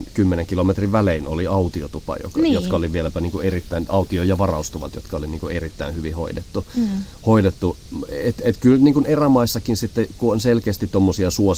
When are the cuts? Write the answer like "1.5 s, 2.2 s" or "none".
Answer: none